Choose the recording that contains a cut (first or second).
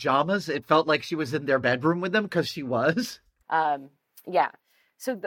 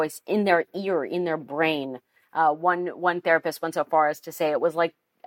first